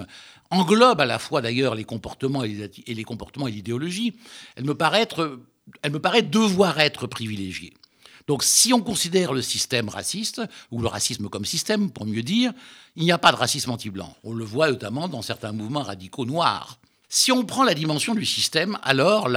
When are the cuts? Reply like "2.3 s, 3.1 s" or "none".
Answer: 14.1 s, 17.0 s